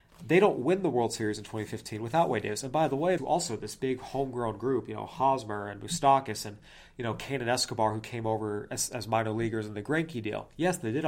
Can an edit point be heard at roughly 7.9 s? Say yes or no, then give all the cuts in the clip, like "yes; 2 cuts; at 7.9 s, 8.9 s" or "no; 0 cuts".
no; 1 cut; at 3.2 s